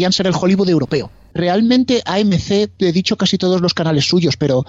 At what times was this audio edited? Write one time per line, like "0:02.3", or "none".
0:01.3